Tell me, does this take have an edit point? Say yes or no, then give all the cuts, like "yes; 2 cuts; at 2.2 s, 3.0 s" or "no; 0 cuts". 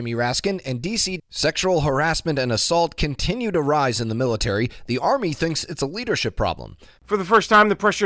yes; 2 cuts; at 1.2 s, 7.0 s